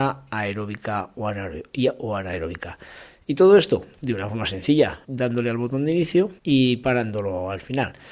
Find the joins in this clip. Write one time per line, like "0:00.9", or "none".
0:04.0
0:05.0
0:06.4